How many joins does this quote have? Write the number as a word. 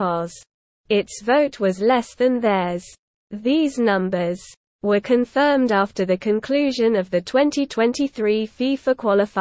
one